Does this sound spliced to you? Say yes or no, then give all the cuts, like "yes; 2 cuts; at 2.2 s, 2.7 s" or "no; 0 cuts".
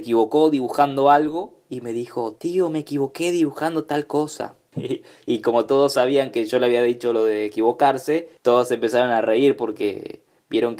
yes; 2 cuts; at 4.7 s, 8.4 s